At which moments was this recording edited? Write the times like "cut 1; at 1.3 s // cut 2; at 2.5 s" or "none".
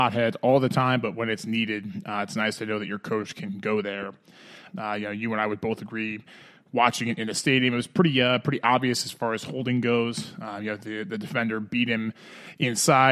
cut 1; at 4.7 s